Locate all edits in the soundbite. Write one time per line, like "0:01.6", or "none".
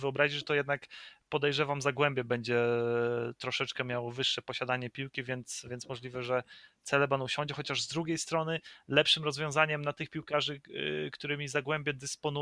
none